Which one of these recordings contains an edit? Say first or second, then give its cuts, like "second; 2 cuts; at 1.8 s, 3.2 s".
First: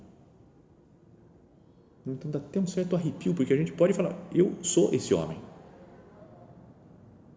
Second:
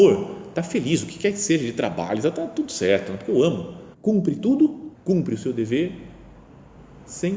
second; 2 cuts; at 3.9 s, 4.9 s